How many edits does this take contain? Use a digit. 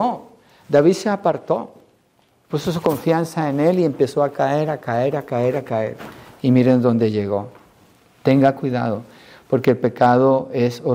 0